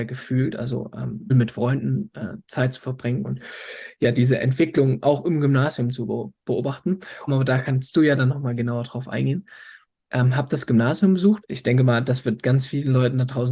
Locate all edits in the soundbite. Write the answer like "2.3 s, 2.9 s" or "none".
1.3 s, 7.3 s, 11.4 s